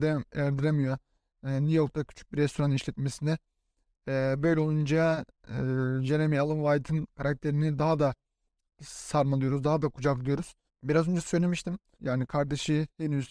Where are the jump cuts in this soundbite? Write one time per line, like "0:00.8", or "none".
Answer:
0:10.7
0:11.9